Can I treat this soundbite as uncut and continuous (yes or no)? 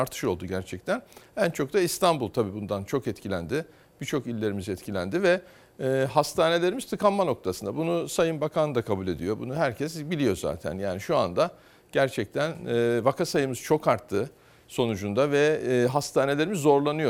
yes